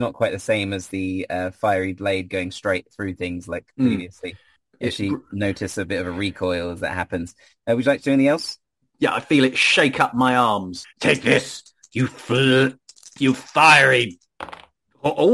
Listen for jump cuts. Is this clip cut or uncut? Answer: cut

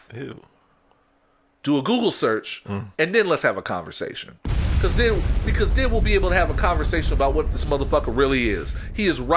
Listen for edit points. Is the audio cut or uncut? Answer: cut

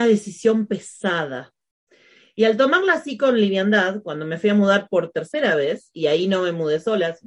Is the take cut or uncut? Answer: uncut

